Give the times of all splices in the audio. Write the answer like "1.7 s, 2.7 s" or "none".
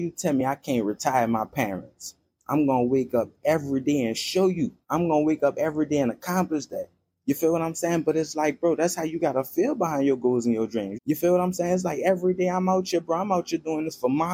4.8 s, 10.9 s